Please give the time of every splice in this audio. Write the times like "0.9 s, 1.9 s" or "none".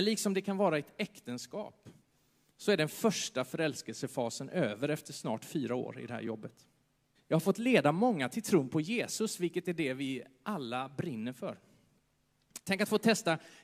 7.1 s, 12.6 s